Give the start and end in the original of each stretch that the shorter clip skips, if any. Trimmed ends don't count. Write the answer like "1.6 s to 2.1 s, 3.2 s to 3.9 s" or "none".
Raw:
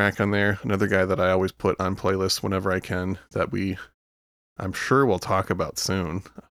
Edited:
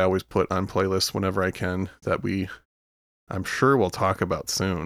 none